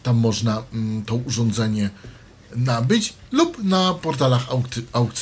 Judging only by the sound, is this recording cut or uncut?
uncut